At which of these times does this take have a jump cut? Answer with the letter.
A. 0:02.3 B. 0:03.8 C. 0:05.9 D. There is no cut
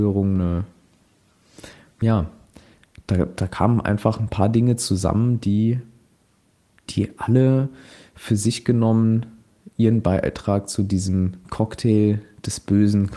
D